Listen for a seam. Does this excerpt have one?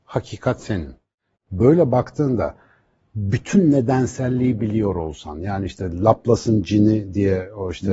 yes; 1 cut; at 1.3 s

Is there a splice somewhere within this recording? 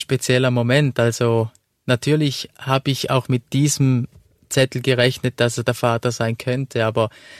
no; 0 cuts

